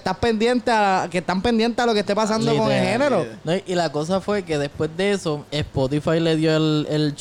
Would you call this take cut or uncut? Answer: cut